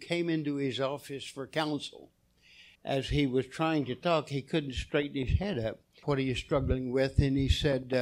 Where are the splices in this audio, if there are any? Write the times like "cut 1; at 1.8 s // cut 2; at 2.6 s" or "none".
cut 1; at 2.8 s // cut 2; at 6.0 s

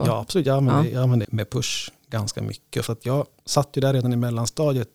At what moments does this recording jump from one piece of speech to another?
cut 1; at 1.2 s // cut 2; at 2.9 s

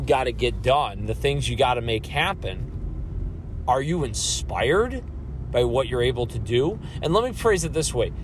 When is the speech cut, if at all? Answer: none

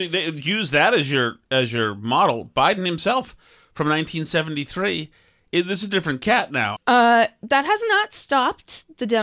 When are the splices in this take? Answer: cut 1; at 6.8 s

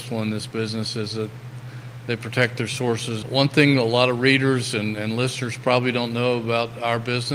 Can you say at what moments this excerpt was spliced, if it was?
cut 1; at 3.2 s

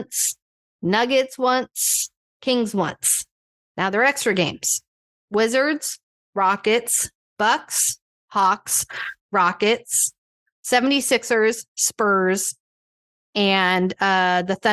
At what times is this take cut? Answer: cut 1; at 7.3 s // cut 2; at 10.6 s

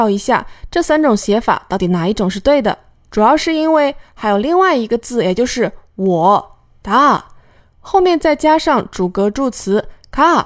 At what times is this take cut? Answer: cut 1; at 3.1 s

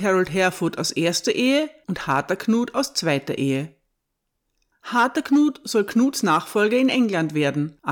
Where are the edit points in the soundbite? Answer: none

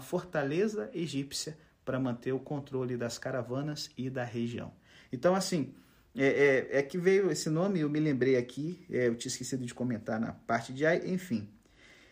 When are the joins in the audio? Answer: none

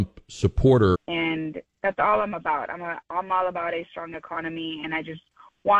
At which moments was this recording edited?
cut 1; at 0.9 s

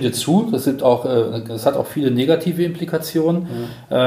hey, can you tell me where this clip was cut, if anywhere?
none

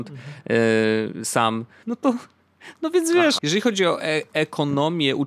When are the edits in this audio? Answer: cut 1; at 1.8 s // cut 2; at 3.4 s

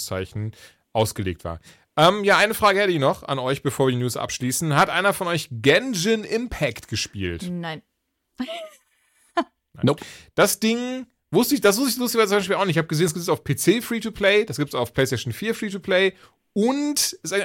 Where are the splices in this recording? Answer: none

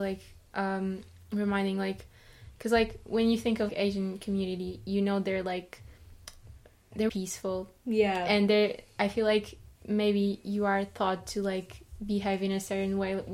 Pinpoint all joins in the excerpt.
cut 1; at 3.7 s // cut 2; at 7.1 s

